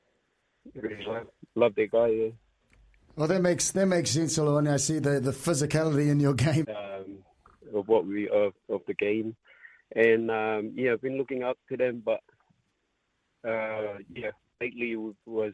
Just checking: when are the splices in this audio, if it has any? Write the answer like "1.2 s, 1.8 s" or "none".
6.6 s